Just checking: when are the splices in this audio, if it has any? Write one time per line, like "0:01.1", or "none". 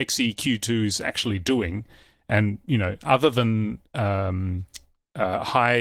none